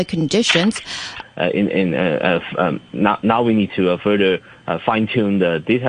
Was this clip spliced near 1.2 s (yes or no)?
yes